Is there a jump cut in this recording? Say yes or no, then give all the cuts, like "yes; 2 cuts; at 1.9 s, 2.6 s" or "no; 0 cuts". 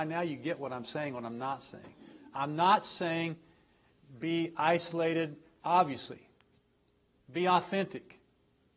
yes; 1 cut; at 5.6 s